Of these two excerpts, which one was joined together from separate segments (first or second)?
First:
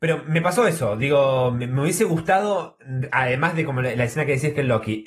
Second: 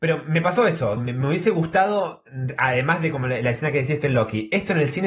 second